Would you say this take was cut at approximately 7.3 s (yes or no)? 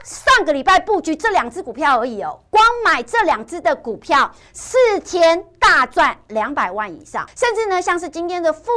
yes